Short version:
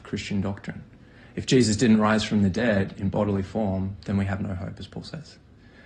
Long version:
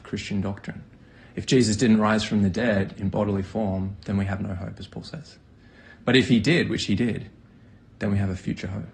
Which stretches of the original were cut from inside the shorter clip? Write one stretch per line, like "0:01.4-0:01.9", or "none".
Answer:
none